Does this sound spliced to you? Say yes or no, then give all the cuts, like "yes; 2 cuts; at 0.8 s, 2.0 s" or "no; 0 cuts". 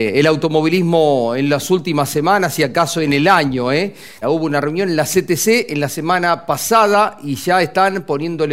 yes; 1 cut; at 4.2 s